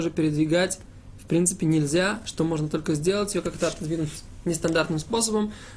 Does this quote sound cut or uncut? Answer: uncut